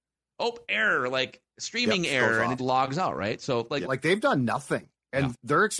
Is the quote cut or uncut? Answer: cut